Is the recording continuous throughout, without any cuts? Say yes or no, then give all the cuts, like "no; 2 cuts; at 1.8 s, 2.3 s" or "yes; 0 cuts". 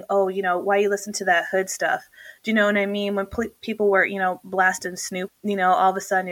no; 1 cut; at 5.3 s